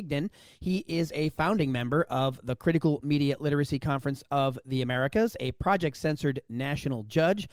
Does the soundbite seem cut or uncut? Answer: uncut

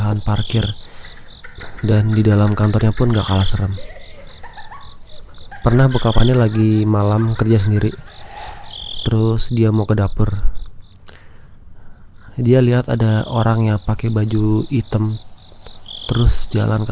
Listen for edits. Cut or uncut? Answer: uncut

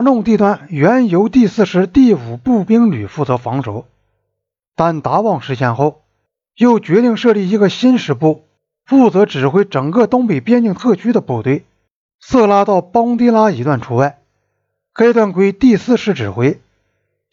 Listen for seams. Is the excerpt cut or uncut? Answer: uncut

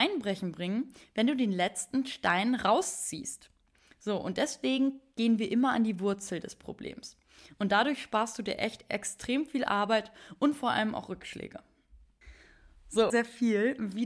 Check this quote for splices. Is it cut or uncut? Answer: cut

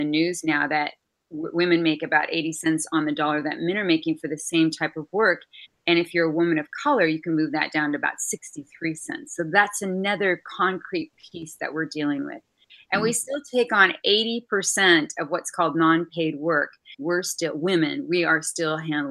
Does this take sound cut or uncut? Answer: cut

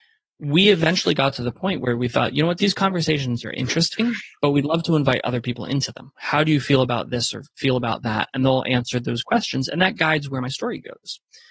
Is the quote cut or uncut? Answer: cut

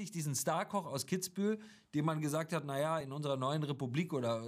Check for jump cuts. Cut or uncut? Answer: uncut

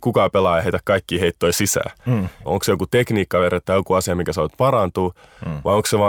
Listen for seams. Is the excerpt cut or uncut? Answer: cut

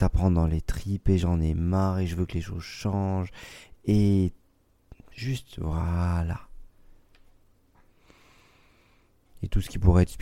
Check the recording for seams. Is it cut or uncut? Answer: uncut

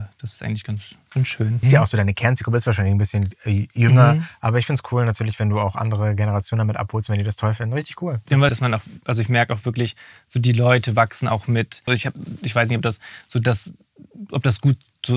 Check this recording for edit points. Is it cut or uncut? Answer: cut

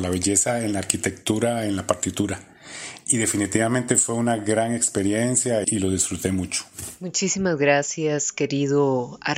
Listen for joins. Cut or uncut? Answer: cut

